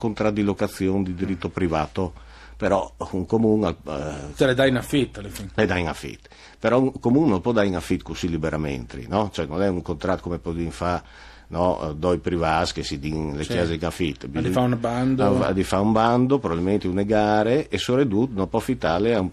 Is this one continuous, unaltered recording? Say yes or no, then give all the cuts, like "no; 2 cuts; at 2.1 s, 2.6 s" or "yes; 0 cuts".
yes; 0 cuts